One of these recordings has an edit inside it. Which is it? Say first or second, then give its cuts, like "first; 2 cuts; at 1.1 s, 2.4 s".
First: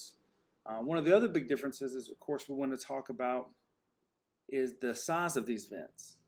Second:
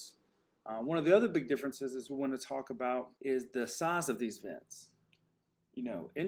second; 2 cuts; at 2.1 s, 3.2 s